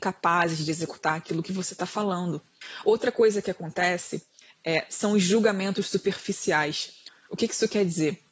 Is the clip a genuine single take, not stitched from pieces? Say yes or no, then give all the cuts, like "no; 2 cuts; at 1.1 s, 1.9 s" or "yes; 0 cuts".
yes; 0 cuts